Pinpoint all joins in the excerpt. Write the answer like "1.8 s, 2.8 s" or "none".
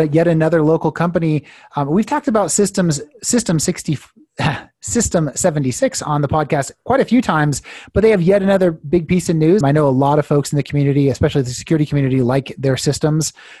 9.6 s